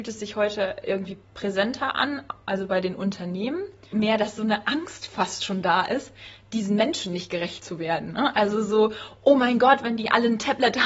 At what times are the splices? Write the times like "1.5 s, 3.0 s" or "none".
3.9 s